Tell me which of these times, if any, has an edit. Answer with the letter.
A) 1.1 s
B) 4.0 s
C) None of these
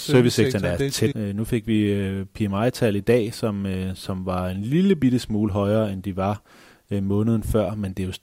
A